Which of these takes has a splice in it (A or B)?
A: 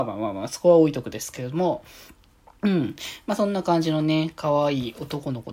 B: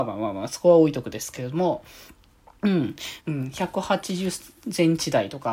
B